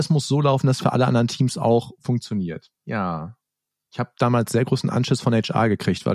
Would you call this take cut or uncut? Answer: uncut